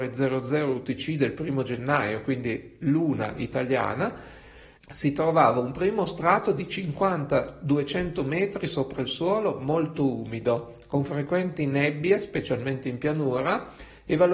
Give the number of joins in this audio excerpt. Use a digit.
1